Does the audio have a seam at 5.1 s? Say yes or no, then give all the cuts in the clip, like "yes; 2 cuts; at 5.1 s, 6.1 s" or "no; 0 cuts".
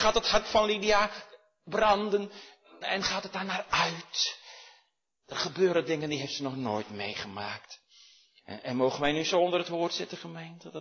no; 2 cuts; at 2.8 s, 8.6 s